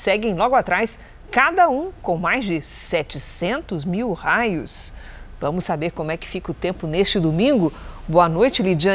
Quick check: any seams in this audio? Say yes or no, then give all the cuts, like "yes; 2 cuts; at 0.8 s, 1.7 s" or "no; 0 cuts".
no; 0 cuts